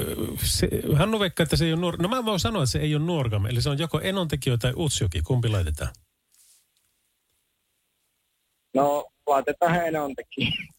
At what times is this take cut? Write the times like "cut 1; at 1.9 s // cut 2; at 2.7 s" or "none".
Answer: none